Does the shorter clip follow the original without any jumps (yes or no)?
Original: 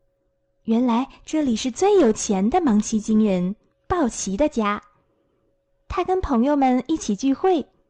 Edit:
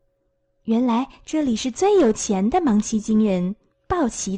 yes